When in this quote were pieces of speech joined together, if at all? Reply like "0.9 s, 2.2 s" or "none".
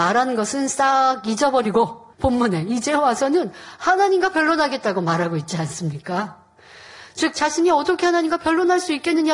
2.1 s, 7.1 s